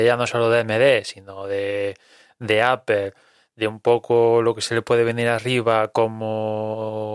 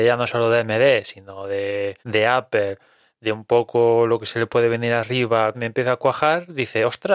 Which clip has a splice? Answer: second; 2 cuts; at 2.0 s, 5.5 s

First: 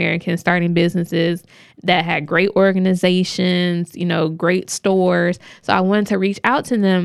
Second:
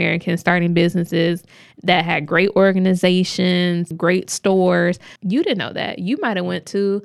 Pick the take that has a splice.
second; 2 cuts; at 3.9 s, 5.2 s

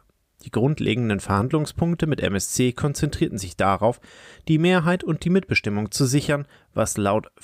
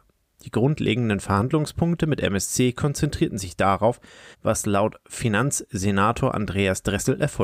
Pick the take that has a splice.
second; 1 cut; at 4.3 s

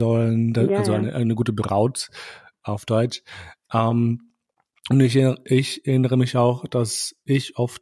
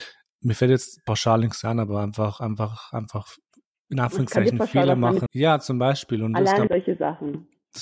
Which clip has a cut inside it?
second; 2 cuts; at 5.3 s, 6.7 s

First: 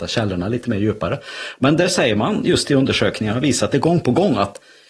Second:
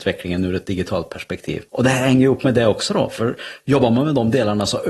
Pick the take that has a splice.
second; 1 cut; at 1.7 s

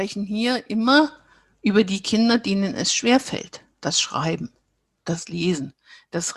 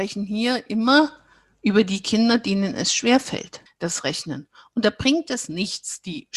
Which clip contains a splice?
second; 1 cut; at 3.7 s

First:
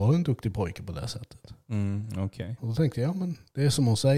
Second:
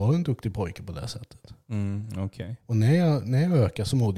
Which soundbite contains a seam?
first; 1 cut; at 2.6 s

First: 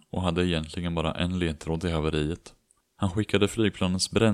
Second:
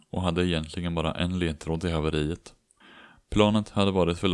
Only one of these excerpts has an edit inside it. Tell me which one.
first; 1 cut; at 2.8 s

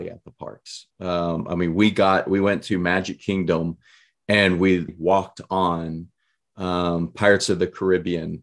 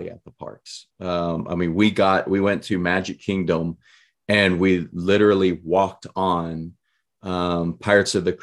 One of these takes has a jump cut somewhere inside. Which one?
first; 1 cut; at 4.9 s

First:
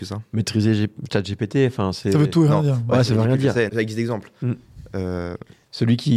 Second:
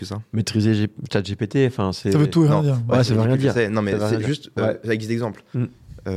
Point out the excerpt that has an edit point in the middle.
first; 1 cut; at 3.7 s

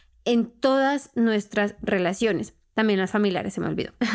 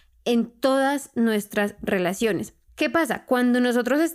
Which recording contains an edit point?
second; 1 cut; at 2.7 s

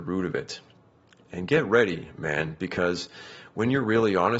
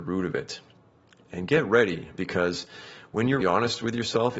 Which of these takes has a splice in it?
second; 2 cuts; at 2.2 s, 3.4 s

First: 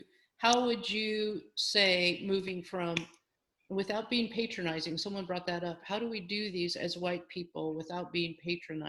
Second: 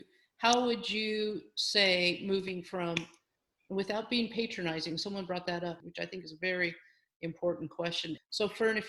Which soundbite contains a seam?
second; 1 cut; at 5.8 s

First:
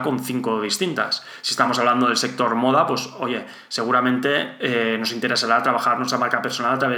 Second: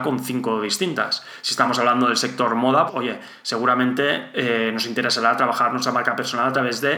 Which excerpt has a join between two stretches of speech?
second; 1 cut; at 2.9 s

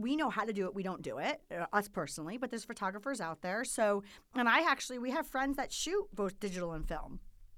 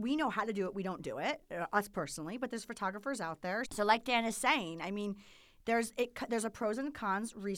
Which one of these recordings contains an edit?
second; 1 cut; at 3.6 s

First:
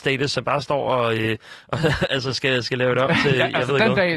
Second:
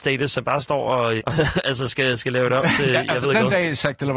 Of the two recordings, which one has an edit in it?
second; 1 cut; at 1.2 s

